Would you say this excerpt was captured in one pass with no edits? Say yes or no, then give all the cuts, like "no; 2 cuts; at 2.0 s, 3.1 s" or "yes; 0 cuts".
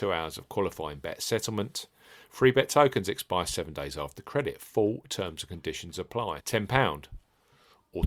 no; 1 cut; at 6.4 s